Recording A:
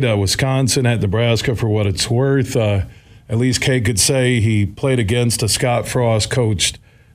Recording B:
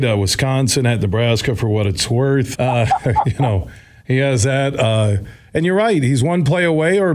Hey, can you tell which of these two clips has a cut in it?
B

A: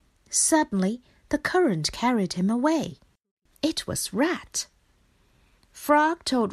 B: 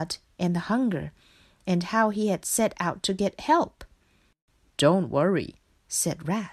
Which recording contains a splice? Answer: A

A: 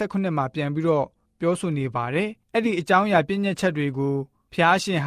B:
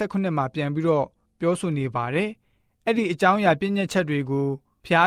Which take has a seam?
A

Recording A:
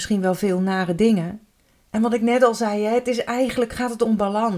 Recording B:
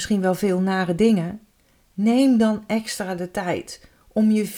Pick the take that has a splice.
A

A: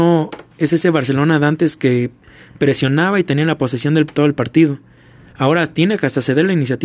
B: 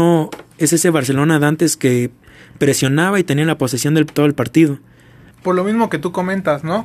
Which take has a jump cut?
B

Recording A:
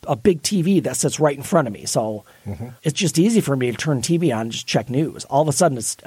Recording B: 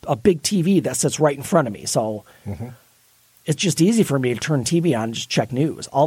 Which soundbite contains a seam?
A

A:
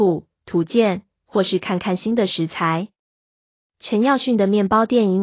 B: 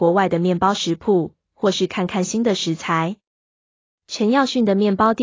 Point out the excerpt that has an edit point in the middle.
B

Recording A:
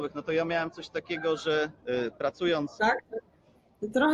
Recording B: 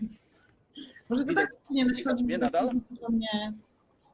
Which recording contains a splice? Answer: A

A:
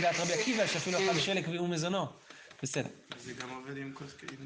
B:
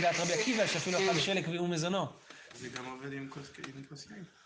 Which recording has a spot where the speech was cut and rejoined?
B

